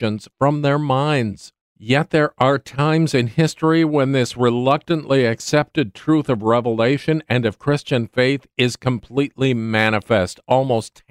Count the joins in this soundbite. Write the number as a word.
one